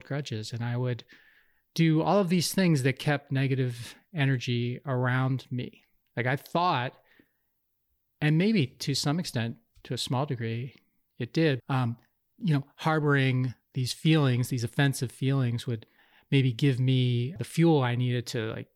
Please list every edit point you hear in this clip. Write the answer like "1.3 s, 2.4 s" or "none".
11.6 s, 17.4 s